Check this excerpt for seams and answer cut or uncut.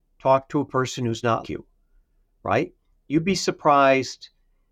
cut